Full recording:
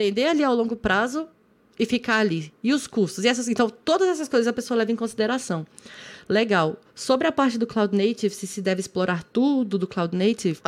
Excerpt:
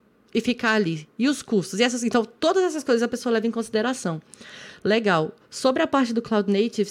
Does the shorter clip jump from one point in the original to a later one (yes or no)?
no